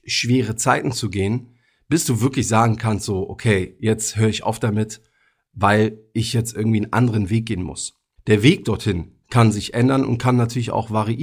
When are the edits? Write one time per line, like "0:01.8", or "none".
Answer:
0:08.2